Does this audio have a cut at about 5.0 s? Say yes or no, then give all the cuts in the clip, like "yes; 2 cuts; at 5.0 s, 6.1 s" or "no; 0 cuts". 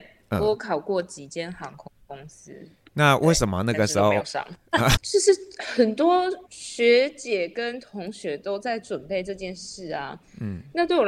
yes; 2 cuts; at 5.0 s, 6.5 s